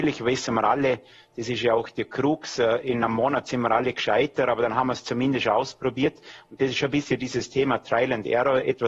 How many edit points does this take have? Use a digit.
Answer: 0